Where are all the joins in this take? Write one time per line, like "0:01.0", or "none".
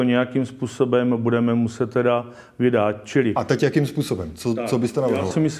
none